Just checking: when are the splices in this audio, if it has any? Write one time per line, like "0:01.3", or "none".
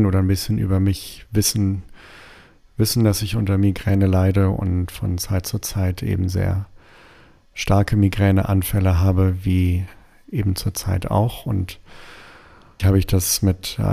0:12.8